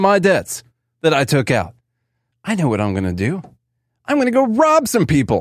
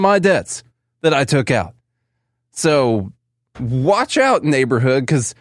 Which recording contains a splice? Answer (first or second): first